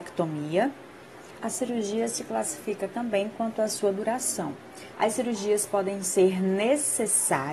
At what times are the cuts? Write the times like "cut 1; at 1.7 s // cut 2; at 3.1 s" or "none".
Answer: cut 1; at 1.4 s // cut 2; at 4.9 s